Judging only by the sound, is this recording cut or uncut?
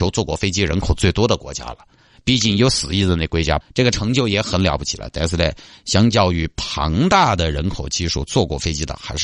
cut